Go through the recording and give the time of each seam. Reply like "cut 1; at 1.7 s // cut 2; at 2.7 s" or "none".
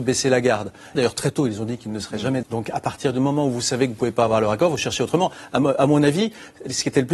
cut 1; at 1.0 s // cut 2; at 2.4 s